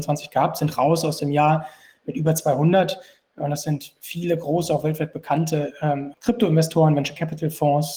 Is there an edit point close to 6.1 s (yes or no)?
yes